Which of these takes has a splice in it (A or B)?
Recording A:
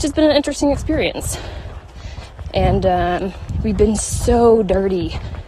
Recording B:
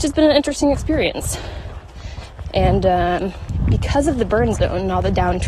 A